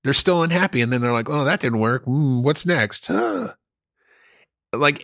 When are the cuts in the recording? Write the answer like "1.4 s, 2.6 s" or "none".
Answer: none